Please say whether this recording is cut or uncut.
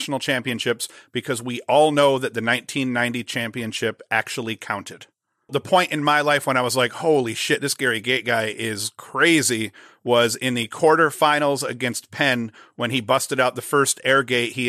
uncut